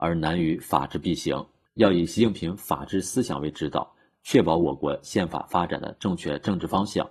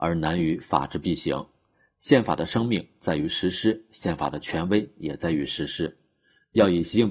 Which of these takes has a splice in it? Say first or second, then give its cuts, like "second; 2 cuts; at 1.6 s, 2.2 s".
first; 2 cuts; at 1.7 s, 4.1 s